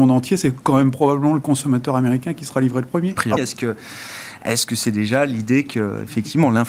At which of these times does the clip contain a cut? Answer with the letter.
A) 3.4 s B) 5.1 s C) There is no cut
A